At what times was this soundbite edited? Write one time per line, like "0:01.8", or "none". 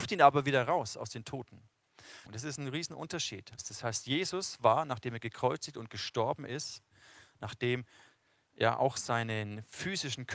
0:02.2
0:03.6
0:08.4